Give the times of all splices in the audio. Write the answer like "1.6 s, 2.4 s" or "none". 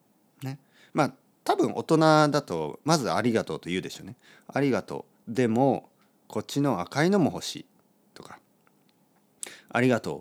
none